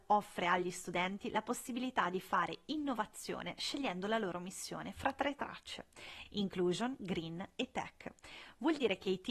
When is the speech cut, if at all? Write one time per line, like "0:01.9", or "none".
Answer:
none